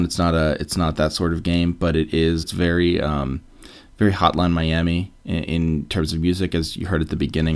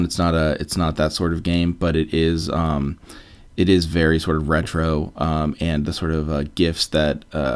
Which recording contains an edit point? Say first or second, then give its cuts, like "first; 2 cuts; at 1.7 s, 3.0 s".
first; 2 cuts; at 2.4 s, 5.4 s